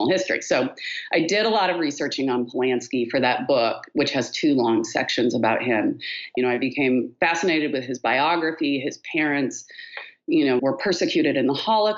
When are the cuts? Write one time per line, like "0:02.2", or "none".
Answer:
0:06.4
0:10.6